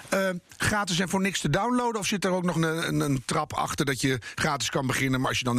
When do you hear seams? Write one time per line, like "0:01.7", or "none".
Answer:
0:02.5